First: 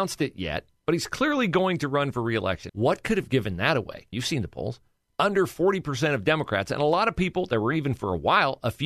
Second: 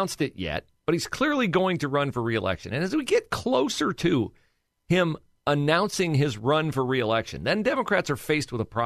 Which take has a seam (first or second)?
first